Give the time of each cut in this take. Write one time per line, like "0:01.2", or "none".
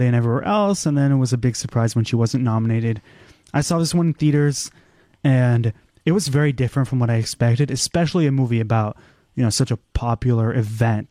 none